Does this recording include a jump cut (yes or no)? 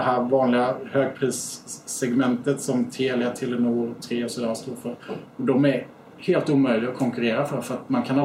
yes